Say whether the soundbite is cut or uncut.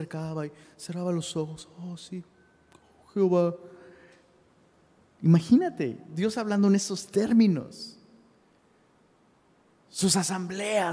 uncut